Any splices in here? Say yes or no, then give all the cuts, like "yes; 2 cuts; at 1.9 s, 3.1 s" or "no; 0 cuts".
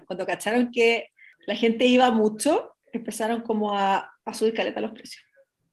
no; 0 cuts